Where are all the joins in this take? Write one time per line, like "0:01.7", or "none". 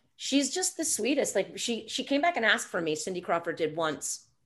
none